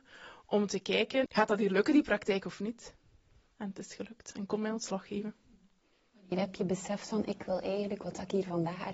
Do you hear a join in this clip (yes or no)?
yes